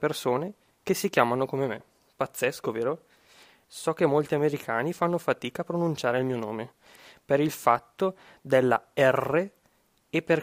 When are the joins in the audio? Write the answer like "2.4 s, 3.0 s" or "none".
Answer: 3.6 s